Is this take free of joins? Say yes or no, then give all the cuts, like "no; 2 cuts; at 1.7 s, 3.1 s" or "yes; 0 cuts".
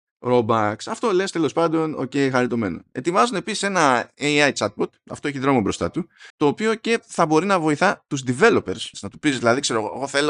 no; 2 cuts; at 6.3 s, 8.9 s